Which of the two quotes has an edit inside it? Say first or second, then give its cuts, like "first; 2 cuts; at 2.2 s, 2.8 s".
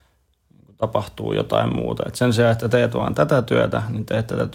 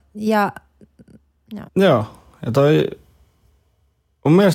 second; 1 cut; at 1.7 s